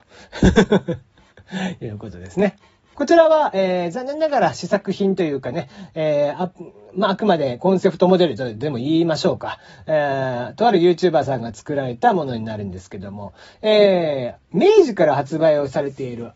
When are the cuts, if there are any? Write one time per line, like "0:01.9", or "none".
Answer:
0:02.9